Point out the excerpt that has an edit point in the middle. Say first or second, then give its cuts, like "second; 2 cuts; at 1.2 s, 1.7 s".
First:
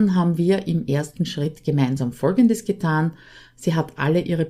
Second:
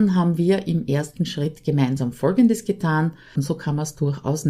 second; 1 cut; at 3.4 s